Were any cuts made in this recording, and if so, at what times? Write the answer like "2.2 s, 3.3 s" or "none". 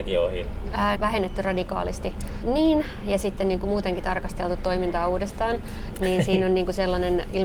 0.9 s, 2.4 s